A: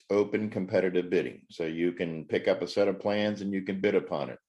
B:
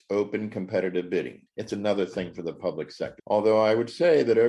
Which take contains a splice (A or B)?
B